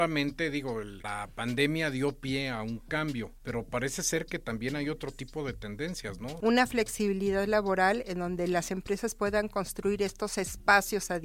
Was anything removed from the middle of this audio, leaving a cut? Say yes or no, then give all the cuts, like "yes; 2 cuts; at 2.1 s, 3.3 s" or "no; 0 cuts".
yes; 1 cut; at 6.4 s